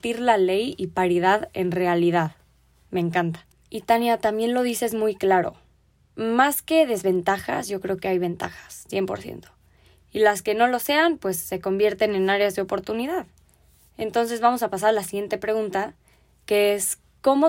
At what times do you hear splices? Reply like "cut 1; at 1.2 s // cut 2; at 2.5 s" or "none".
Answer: none